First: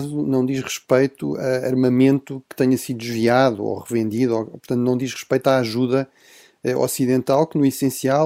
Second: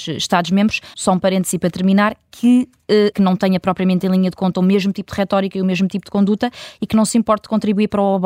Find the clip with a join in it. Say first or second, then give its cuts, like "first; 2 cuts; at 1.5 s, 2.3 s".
second; 2 cuts; at 0.9 s, 3.1 s